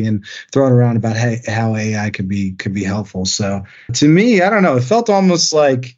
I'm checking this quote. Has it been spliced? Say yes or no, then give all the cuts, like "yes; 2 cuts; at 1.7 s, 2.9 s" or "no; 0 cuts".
yes; 1 cut; at 3.9 s